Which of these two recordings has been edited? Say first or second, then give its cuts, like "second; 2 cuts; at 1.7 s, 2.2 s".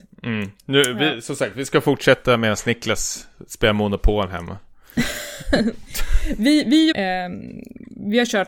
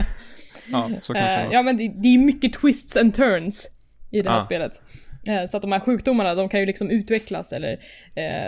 first; 1 cut; at 6.9 s